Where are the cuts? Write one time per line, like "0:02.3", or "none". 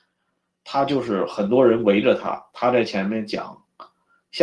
none